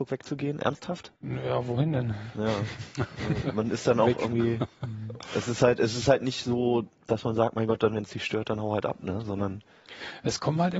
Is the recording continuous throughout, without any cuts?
no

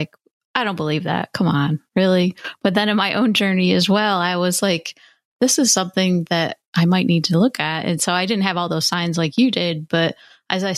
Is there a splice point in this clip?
no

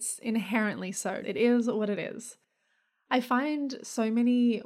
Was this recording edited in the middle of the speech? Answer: yes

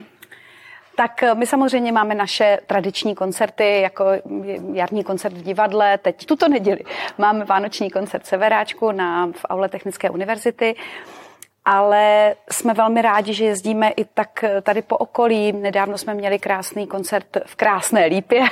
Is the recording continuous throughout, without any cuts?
yes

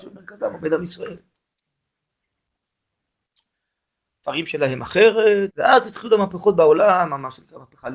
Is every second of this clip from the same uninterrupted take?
no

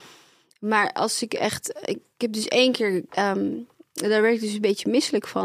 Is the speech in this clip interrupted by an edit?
yes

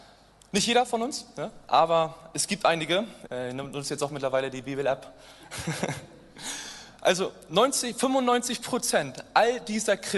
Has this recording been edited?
yes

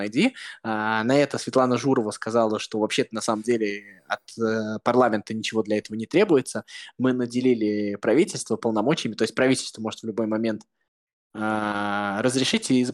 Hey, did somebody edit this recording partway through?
no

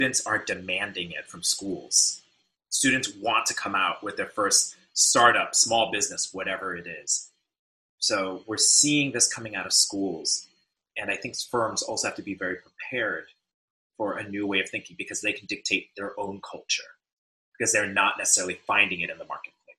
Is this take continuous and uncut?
yes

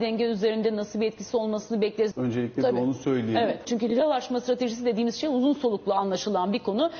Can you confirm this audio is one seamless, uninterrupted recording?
no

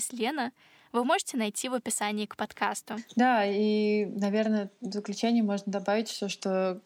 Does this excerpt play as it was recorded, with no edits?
yes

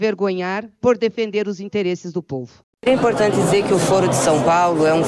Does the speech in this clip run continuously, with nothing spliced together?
no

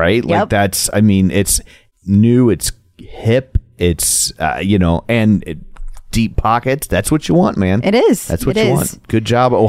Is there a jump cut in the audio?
no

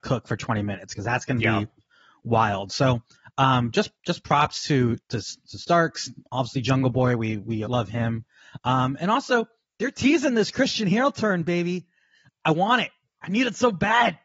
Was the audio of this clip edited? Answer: yes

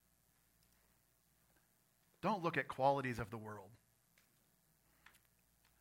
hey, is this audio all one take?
yes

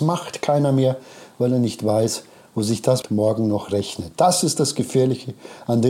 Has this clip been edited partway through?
yes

